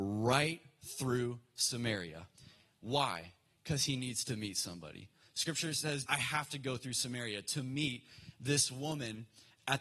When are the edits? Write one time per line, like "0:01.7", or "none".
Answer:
0:06.1

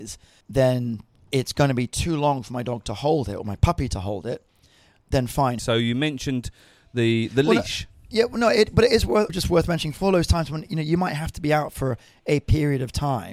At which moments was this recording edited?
0:05.6
0:09.3

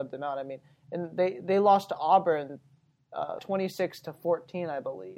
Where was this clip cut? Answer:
0:03.4

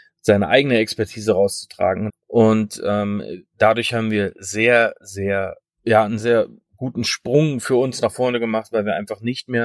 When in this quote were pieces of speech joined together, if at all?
0:02.1
0:06.2

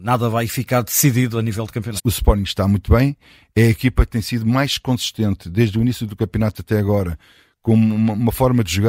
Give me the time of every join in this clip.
0:02.0

